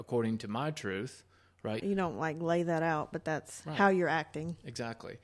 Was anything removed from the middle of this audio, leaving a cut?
yes; 1 cut; at 1.8 s

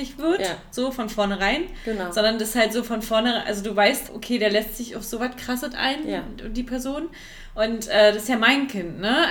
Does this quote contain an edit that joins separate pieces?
yes; 1 cut; at 4.1 s

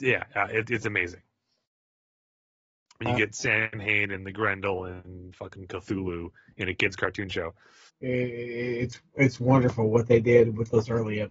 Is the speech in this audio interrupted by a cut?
yes; 1 cut; at 7.9 s

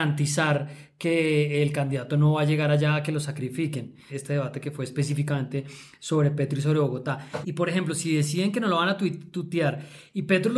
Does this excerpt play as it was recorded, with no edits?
no; 2 cuts; at 4.1 s, 7.4 s

